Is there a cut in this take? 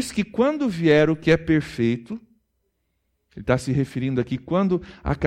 no; 0 cuts

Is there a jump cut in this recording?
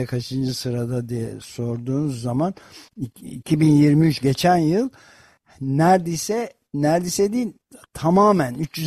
no; 0 cuts

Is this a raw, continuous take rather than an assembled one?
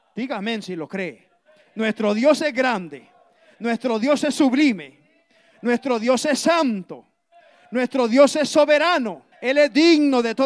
no; 1 cut; at 9.3 s

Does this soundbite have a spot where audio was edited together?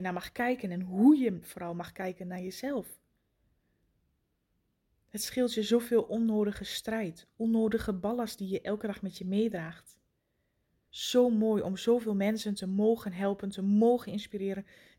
yes; 1 cut; at 10.9 s

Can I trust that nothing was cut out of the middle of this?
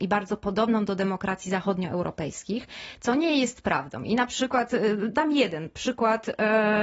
yes; 0 cuts

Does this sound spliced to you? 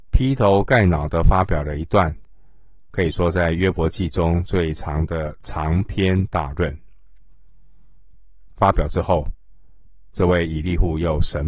no; 0 cuts

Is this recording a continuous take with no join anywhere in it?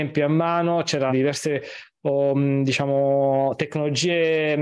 no; 1 cut; at 1.1 s

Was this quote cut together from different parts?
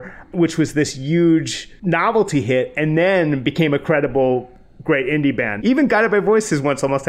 yes; 1 cut; at 5.6 s

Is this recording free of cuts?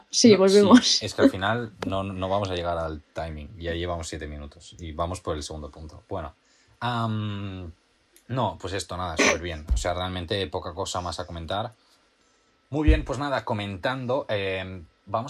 yes; 0 cuts

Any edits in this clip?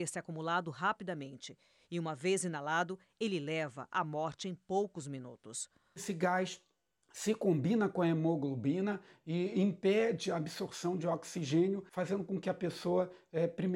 no; 0 cuts

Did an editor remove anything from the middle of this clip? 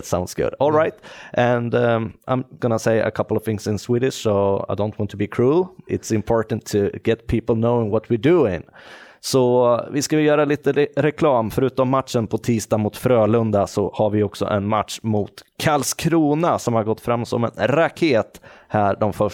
yes; 2 cuts; at 2.6 s, 5.9 s

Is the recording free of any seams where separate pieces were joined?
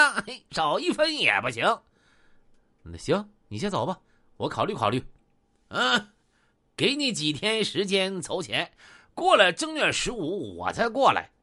yes; 0 cuts

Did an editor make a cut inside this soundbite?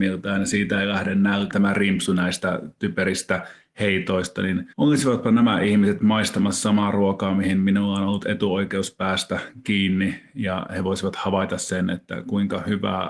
yes; 1 cut; at 1.5 s

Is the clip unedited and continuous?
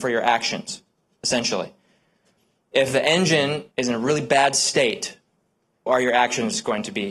no; 2 cuts; at 3.7 s, 5.9 s

